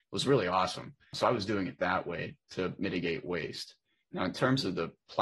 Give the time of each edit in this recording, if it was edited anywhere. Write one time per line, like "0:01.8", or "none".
none